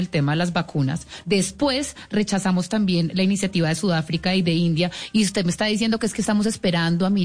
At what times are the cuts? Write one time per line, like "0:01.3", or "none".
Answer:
0:01.2